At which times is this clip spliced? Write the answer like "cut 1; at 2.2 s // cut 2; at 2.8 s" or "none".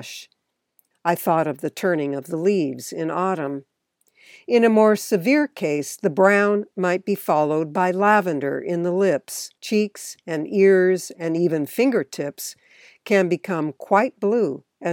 cut 1; at 0.9 s // cut 2; at 9.6 s